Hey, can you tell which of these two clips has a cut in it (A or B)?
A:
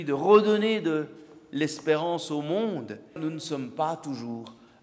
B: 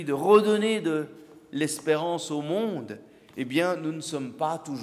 A